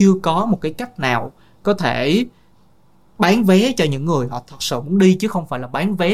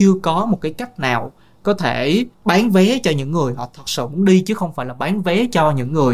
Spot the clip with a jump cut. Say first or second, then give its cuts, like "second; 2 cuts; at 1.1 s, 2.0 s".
second; 1 cut; at 2.3 s